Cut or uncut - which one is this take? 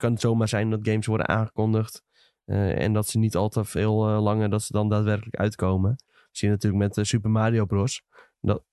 uncut